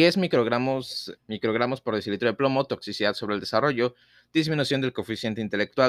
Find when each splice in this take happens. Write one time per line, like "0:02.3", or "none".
0:01.2